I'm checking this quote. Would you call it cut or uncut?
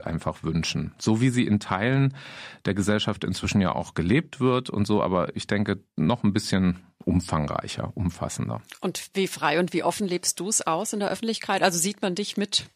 uncut